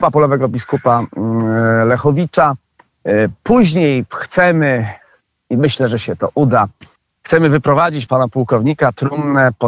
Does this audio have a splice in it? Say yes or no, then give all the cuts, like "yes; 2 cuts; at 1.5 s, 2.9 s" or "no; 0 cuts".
yes; 1 cut; at 8.1 s